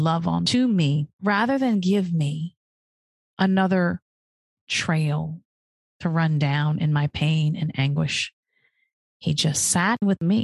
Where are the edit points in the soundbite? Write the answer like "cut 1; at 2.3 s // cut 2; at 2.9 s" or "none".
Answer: cut 1; at 1.1 s